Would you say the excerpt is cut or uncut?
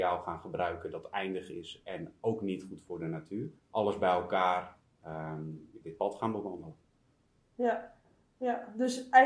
cut